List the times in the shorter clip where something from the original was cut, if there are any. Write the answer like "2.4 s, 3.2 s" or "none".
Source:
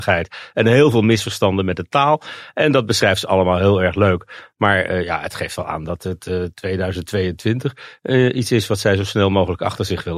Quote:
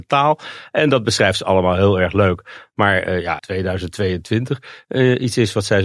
3.4 s